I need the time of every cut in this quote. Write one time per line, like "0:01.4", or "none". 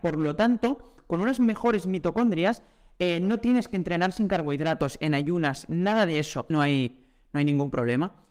0:06.5